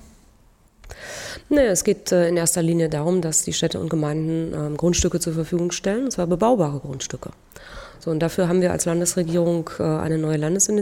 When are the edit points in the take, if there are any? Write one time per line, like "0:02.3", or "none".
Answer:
none